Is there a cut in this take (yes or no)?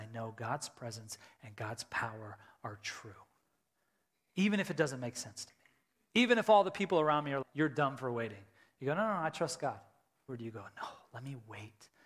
yes